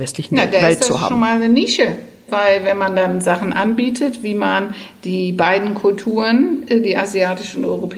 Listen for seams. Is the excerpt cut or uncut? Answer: uncut